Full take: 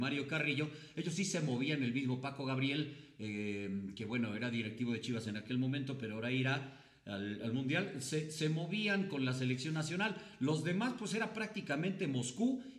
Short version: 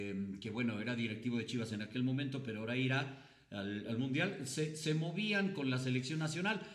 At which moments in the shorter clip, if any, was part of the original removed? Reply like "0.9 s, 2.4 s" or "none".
none